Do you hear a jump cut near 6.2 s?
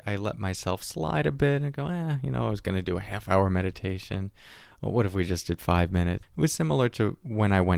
yes; 1 cut; at 6.2 s

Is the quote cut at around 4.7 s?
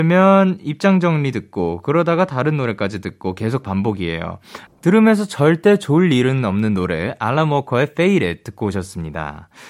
yes; 1 cut; at 4.7 s

